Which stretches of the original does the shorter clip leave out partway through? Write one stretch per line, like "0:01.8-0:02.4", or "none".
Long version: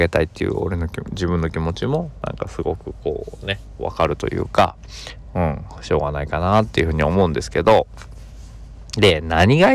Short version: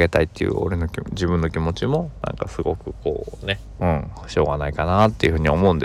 0:03.8-0:05.3